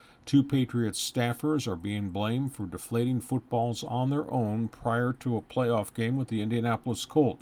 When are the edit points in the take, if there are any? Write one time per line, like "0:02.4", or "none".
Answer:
none